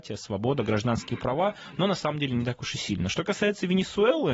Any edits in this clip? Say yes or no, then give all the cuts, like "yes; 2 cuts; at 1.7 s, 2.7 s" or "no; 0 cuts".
no; 0 cuts